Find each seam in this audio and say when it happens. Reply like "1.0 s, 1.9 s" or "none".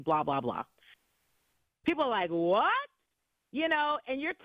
1.8 s